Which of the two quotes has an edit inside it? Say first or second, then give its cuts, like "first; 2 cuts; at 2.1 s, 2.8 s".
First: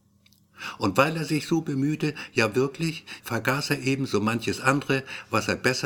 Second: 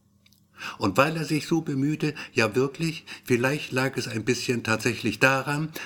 first; 1 cut; at 3.2 s